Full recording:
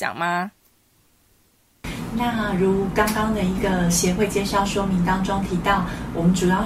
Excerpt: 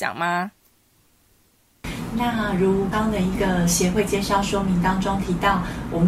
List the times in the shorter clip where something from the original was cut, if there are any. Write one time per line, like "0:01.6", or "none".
0:02.9